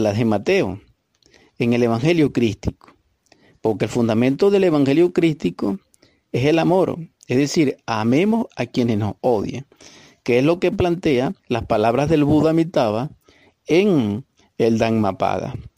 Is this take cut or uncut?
cut